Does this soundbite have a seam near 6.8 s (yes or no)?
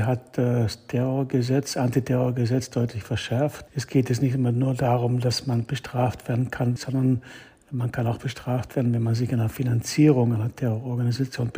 yes